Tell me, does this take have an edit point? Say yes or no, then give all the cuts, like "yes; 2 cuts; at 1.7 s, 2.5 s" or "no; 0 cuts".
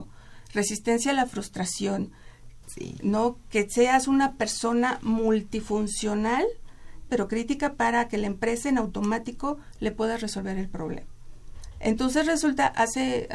yes; 2 cuts; at 2.6 s, 7.1 s